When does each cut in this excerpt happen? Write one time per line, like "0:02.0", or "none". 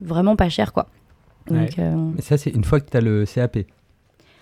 0:01.5